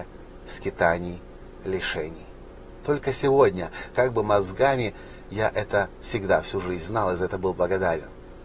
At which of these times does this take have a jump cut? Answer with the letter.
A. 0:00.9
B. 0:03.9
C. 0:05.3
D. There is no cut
B